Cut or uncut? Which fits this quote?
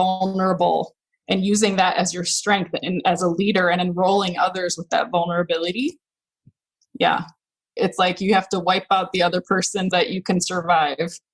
cut